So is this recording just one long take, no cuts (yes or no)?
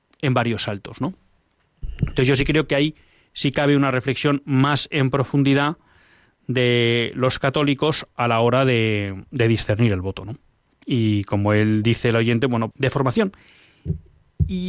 no